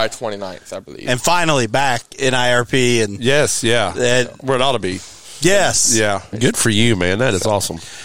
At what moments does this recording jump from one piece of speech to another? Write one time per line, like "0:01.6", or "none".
0:06.3